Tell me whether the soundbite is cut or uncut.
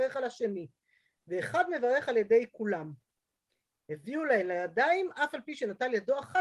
uncut